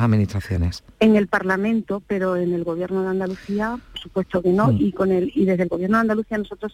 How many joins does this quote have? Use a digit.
0